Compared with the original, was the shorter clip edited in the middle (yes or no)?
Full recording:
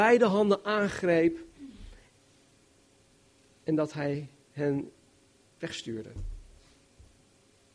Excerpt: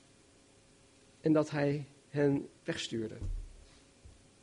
yes